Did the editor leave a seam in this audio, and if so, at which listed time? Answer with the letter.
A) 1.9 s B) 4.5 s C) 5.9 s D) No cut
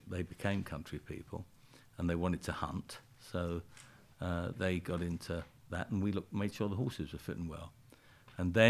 B